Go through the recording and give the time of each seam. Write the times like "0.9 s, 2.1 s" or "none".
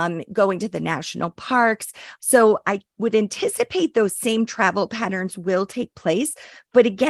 2.2 s